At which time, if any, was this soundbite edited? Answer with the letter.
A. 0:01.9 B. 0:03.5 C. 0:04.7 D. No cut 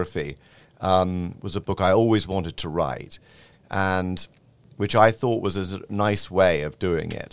B